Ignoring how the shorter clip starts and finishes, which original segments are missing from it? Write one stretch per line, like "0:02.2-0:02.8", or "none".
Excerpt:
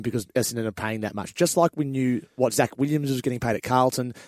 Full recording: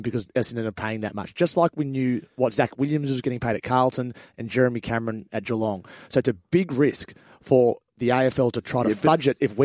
none